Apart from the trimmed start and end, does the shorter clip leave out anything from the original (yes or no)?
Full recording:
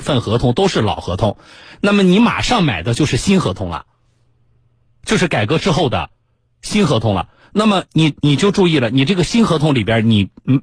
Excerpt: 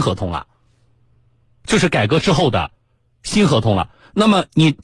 no